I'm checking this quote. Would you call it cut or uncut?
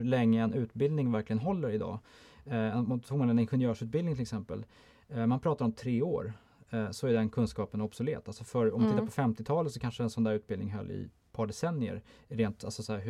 uncut